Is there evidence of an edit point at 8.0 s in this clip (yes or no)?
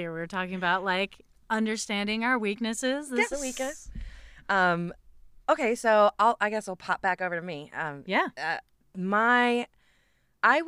yes